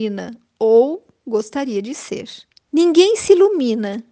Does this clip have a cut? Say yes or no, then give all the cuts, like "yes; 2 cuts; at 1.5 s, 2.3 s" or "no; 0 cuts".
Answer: yes; 1 cut; at 2.7 s